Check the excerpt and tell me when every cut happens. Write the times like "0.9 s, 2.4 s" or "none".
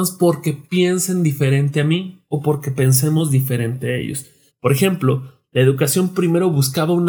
4.5 s